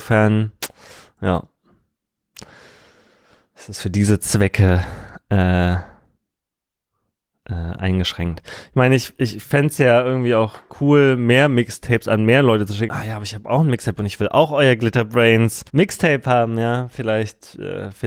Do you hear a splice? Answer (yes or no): yes